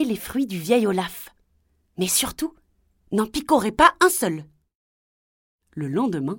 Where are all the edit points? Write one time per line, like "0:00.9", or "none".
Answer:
none

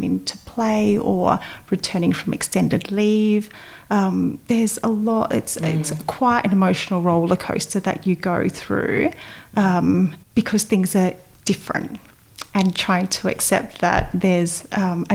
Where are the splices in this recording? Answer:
0:10.2

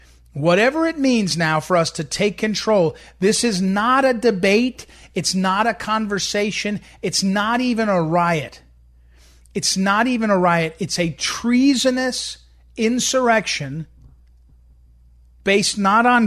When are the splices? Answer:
none

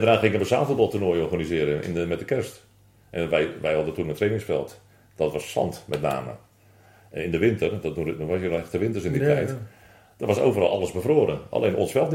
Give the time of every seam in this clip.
none

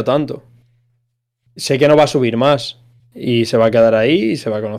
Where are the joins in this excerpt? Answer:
0:01.5
0:03.0

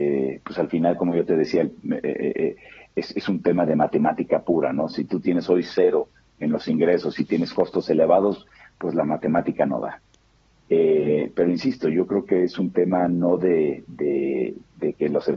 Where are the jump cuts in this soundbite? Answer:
0:10.5

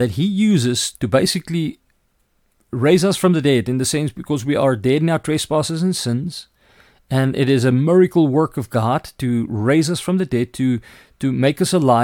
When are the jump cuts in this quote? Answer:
0:00.9

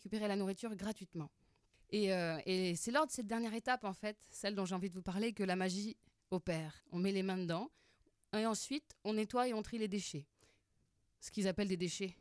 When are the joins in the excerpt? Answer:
0:06.8

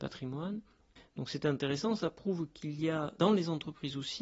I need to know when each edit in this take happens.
none

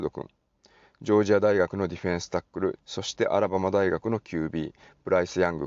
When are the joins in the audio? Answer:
0:02.8

